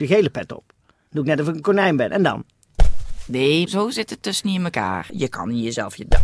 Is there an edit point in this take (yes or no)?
yes